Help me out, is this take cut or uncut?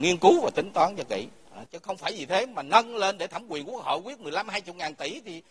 uncut